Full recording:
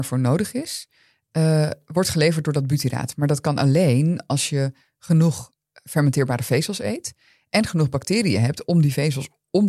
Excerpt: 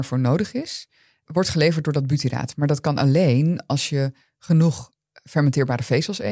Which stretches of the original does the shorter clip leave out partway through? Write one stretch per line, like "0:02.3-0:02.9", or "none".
0:01.3-0:01.9